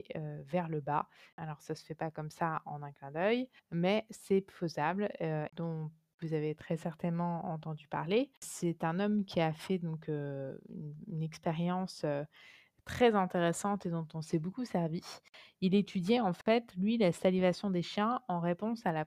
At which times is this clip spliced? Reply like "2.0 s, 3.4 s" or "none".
3.6 s, 5.5 s